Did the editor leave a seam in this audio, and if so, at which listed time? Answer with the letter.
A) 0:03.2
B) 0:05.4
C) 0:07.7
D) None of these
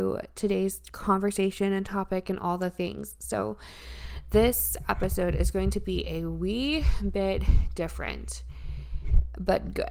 D